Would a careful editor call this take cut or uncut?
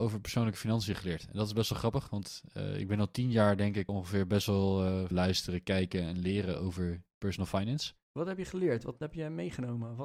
cut